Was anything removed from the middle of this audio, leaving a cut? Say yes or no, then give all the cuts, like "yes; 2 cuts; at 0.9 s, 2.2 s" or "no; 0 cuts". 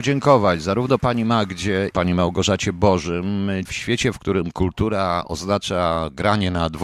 yes; 2 cuts; at 1.9 s, 3.7 s